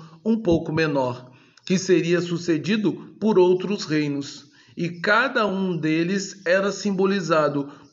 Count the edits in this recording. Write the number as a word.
zero